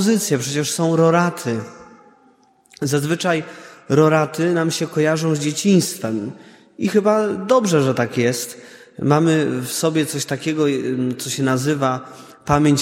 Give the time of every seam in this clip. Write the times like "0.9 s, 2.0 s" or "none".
none